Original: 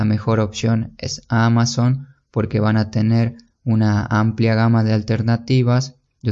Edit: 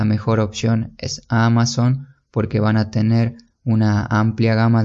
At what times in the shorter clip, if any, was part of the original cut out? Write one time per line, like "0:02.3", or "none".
none